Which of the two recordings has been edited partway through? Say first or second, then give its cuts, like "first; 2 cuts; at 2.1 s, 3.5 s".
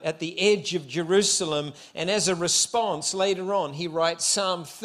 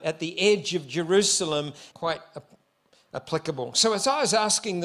second; 1 cut; at 1.9 s